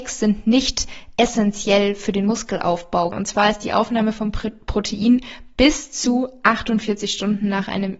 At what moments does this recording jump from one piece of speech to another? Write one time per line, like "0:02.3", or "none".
0:03.1